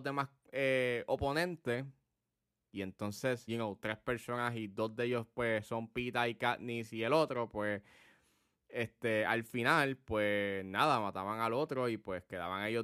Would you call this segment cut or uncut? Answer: cut